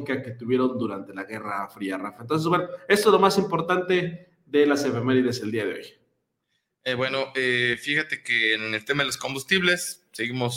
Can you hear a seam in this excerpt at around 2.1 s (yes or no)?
no